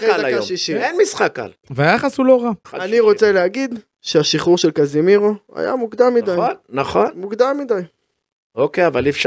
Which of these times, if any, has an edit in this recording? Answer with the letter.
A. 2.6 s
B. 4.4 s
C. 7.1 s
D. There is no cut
A